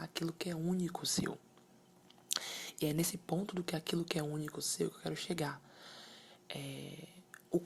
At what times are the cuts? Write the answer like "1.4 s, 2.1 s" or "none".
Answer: none